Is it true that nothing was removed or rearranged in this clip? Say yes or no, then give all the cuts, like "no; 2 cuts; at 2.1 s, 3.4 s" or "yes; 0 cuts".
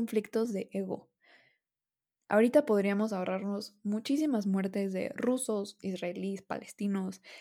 no; 1 cut; at 5.8 s